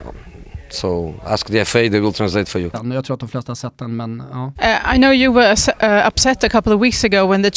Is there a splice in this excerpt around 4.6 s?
yes; 2 cuts; at 2.7 s, 4.6 s

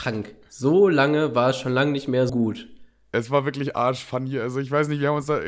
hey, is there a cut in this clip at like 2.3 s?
yes; 1 cut; at 2.3 s

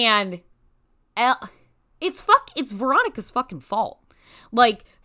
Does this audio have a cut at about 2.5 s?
no; 0 cuts

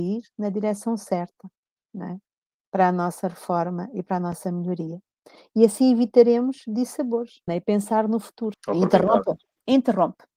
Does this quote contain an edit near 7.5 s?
yes; 2 cuts; at 7.5 s, 8.5 s

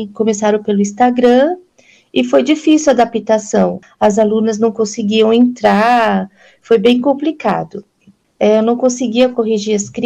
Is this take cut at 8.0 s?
no; 1 cut; at 3.8 s

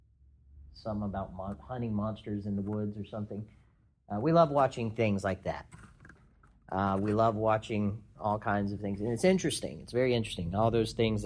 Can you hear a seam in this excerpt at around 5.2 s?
no; 0 cuts

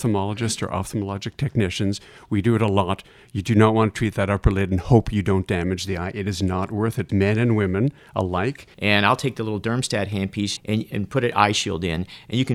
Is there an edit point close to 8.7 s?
yes; 3 cuts; at 7.1 s, 8.7 s, 10.6 s

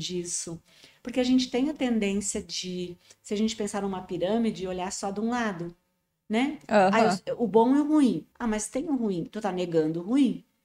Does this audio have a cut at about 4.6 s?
no; 1 cut; at 8.3 s

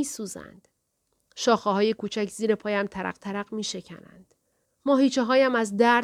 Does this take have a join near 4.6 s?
yes; 1 cut; at 4.6 s

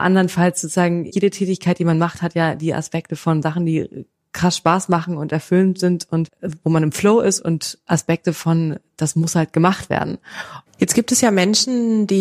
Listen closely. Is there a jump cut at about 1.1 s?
no; 2 cuts; at 7.4 s, 10.7 s

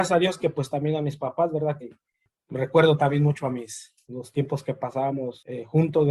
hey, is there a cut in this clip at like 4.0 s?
yes; 2 cuts; at 1.8 s, 4.0 s

